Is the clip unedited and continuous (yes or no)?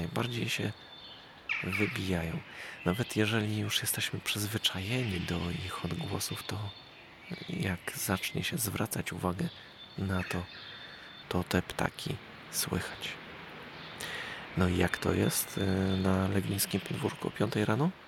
no